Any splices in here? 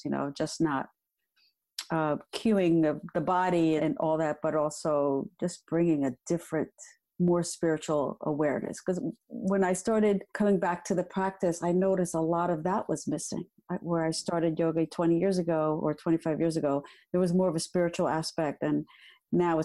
yes; 2 cuts; at 3.8 s, 10.3 s

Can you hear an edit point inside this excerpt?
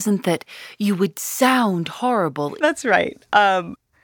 yes; 1 cut; at 2.6 s

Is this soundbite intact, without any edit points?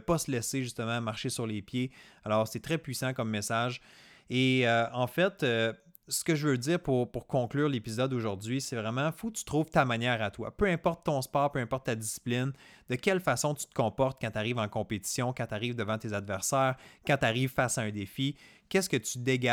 yes; 0 cuts

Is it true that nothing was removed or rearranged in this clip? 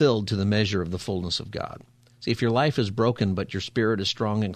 yes; 0 cuts

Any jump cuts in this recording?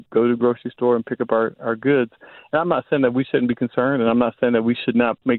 no; 0 cuts

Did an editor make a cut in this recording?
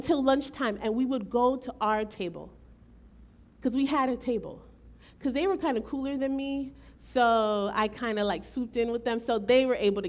no; 0 cuts

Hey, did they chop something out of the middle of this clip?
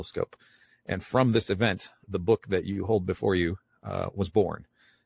yes; 1 cut; at 2.0 s

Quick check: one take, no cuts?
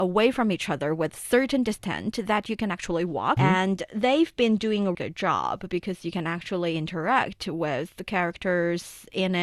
no; 2 cuts; at 3.4 s, 4.9 s

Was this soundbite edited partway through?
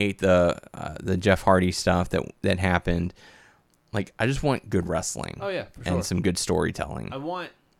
no; 0 cuts

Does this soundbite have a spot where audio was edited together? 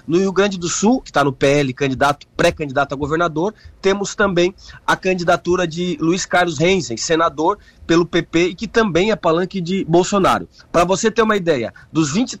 yes; 2 cuts; at 1.0 s, 10.6 s

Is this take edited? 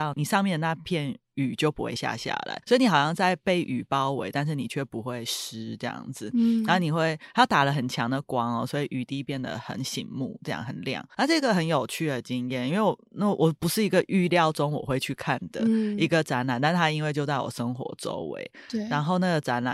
no; 0 cuts

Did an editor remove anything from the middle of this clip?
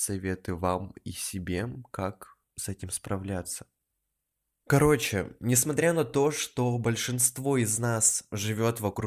no; 0 cuts

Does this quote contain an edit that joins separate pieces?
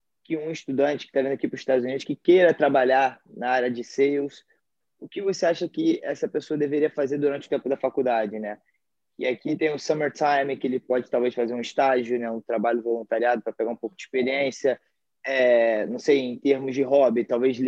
no; 0 cuts

